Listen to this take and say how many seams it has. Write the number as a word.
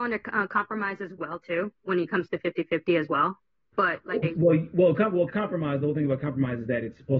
two